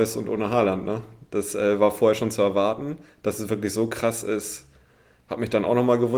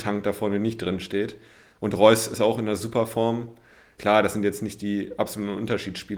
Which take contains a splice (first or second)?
second